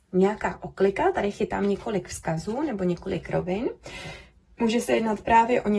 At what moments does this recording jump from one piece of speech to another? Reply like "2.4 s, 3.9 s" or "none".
none